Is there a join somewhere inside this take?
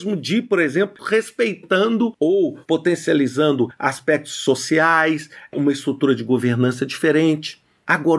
yes; 1 cut; at 1.0 s

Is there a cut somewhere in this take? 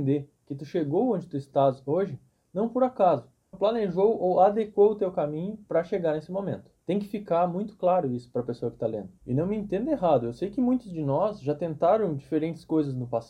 yes; 1 cut; at 3.5 s

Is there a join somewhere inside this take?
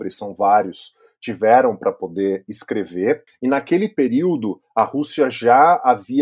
yes; 1 cut; at 3.3 s

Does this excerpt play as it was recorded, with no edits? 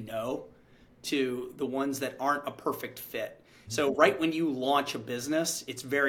no; 1 cut; at 3.7 s

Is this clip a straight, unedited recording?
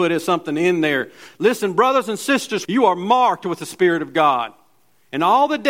no; 1 cut; at 2.6 s

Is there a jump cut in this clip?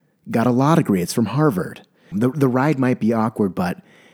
yes; 1 cut; at 2.1 s

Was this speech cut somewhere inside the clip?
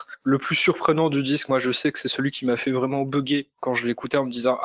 no; 0 cuts

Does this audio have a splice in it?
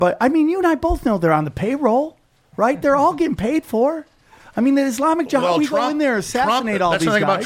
no; 0 cuts

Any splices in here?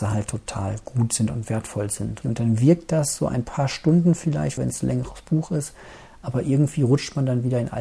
yes; 2 cuts; at 2.2 s, 4.6 s

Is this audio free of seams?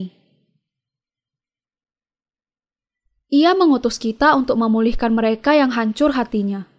yes; 0 cuts

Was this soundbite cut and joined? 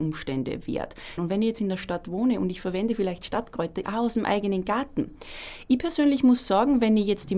yes; 2 cuts; at 1.2 s, 3.8 s

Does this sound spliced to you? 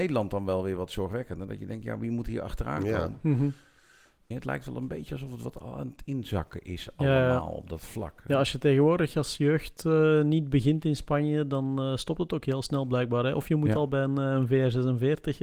yes; 1 cut; at 4.3 s

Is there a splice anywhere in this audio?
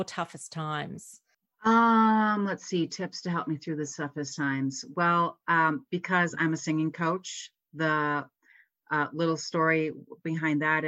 no; 0 cuts

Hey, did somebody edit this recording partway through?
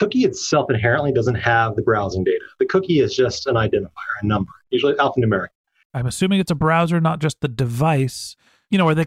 yes; 1 cut; at 5.8 s

